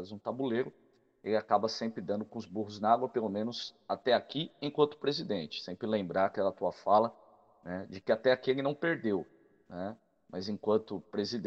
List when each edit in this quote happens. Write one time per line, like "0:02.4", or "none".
none